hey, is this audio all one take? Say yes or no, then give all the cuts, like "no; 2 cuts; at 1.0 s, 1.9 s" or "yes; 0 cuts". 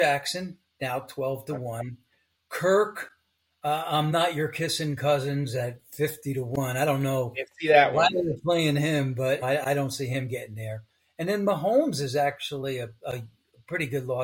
no; 1 cut; at 9.4 s